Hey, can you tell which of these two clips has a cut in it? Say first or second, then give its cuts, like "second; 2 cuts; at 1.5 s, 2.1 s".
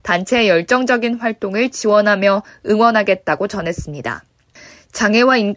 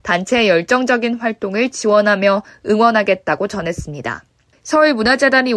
second; 1 cut; at 4.5 s